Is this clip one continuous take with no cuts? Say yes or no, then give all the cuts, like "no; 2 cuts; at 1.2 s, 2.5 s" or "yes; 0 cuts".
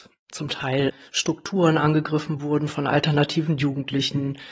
yes; 0 cuts